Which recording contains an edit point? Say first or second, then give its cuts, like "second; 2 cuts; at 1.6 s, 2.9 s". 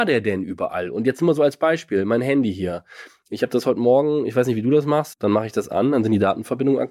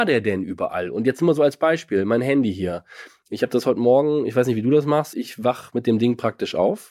first; 1 cut; at 5.1 s